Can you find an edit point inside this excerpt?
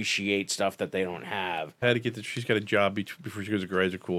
yes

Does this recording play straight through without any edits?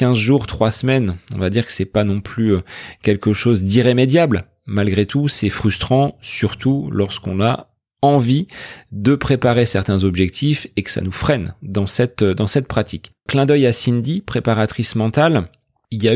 no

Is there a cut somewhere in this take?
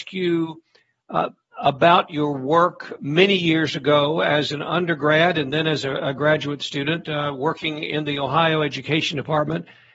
yes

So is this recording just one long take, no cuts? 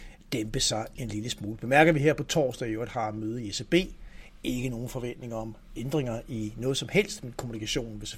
no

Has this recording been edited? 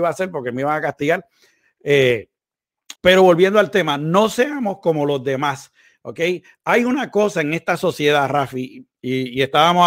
yes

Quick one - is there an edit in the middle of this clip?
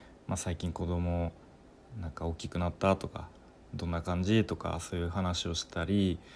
no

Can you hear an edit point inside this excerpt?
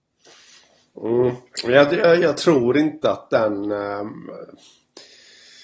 no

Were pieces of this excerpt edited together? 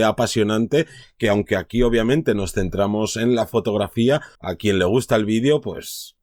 yes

